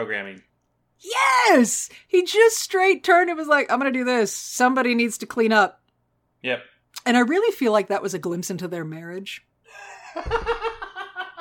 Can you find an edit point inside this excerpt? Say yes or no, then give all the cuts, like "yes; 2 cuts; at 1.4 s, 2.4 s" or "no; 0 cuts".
no; 0 cuts